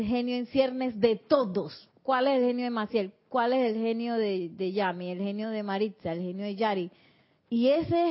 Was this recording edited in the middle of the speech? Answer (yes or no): yes